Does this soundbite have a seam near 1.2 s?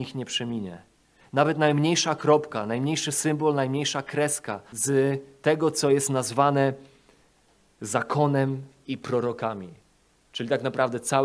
no; 1 cut; at 4.7 s

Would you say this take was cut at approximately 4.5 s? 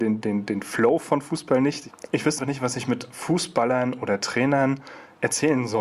no; 1 cut; at 2.4 s

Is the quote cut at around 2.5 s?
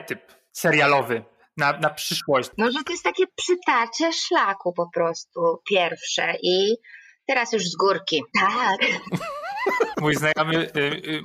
no; 1 cut; at 8.3 s

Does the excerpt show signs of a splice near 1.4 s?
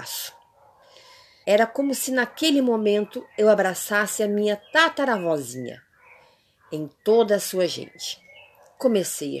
yes; 1 cut; at 1.4 s

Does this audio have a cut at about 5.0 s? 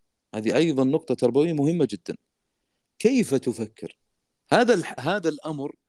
yes; 1 cut; at 5.0 s

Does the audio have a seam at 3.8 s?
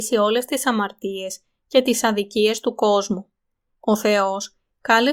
yes; 1 cut; at 3.8 s

